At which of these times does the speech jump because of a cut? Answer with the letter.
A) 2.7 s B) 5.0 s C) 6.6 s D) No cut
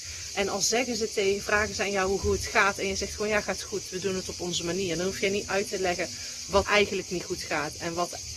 C